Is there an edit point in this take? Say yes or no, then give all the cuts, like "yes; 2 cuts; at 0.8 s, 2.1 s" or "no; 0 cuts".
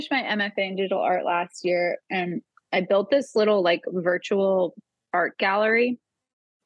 no; 0 cuts